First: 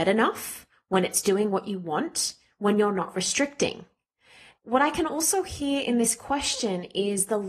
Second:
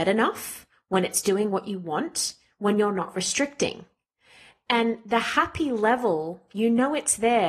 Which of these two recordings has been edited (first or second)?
first